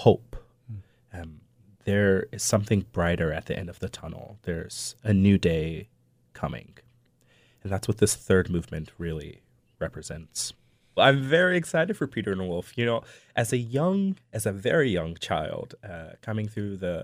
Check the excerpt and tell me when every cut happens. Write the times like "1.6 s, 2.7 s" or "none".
11.0 s